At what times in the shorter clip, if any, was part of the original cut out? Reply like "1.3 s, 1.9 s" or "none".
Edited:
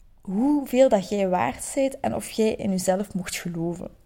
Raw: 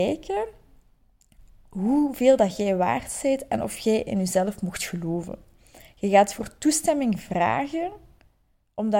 none

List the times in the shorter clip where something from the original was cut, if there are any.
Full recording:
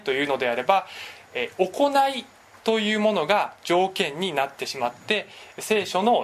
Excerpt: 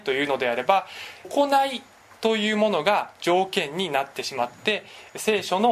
1.2 s

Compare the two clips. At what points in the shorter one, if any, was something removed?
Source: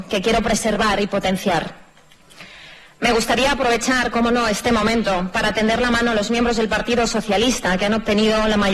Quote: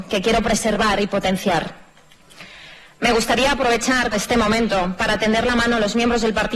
4.1 s

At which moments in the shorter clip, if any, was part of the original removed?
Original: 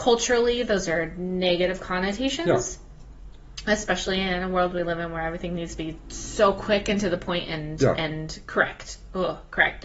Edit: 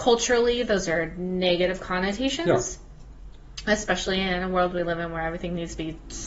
none

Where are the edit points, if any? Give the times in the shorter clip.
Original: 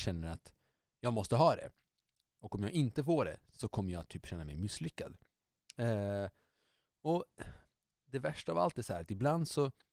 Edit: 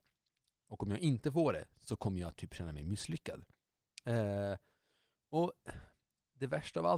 none

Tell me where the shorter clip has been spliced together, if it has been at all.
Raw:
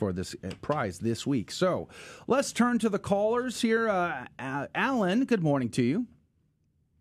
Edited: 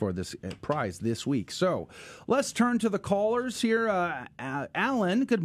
none

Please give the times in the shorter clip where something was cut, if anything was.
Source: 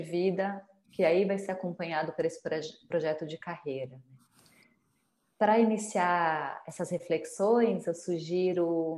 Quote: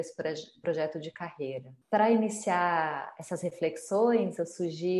1.8 s

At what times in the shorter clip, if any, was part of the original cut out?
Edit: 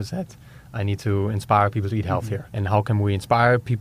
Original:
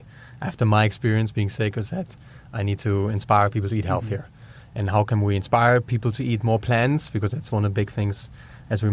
2.5 s

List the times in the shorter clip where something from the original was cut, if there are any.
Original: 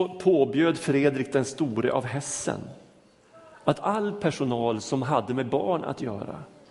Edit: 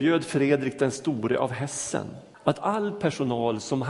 2.3 s

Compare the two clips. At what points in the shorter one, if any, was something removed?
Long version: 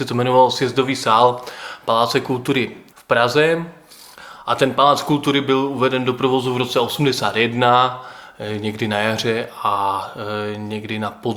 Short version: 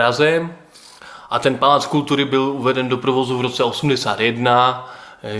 none

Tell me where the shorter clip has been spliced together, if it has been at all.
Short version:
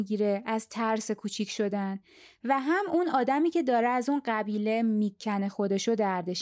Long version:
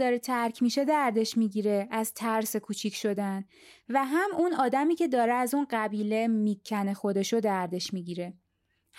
none

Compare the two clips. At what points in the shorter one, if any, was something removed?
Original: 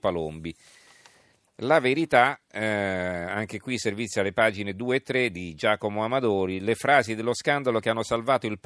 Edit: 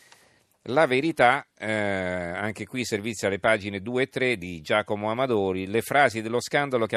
none

